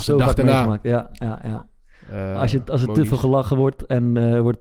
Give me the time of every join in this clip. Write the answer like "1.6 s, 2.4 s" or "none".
none